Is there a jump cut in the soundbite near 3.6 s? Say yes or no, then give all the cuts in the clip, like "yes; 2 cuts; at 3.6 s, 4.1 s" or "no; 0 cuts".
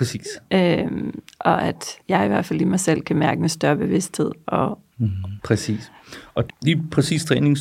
no; 3 cuts; at 2.0 s, 5.4 s, 6.5 s